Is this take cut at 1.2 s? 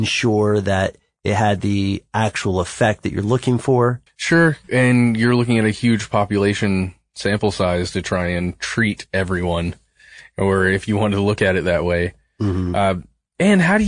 no; 1 cut; at 4.1 s

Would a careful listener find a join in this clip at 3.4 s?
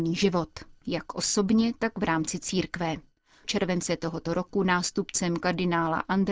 yes; 1 cut; at 3.4 s

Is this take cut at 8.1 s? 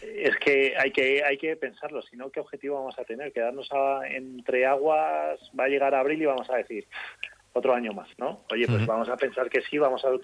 yes; 1 cut; at 8.1 s

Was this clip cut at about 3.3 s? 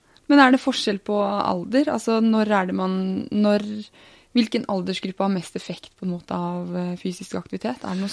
no; 0 cuts

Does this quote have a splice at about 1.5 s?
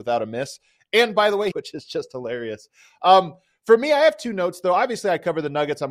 yes; 1 cut; at 1.5 s

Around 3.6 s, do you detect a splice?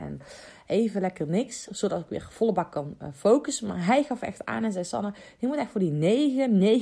no; 0 cuts

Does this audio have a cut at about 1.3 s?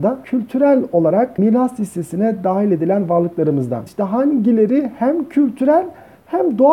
no; 1 cut; at 3.9 s

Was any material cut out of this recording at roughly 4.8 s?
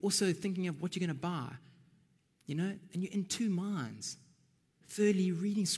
yes; 1 cut; at 4.8 s

